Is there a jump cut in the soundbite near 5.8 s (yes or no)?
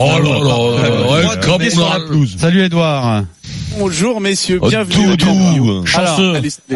no